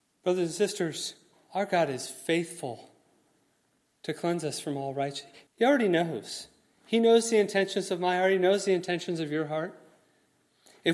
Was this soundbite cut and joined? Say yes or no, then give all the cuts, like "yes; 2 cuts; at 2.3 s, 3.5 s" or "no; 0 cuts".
yes; 1 cut; at 5.5 s